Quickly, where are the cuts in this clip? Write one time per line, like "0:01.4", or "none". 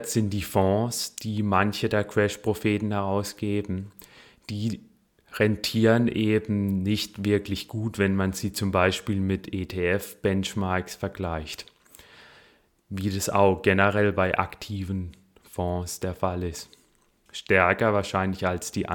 0:17.3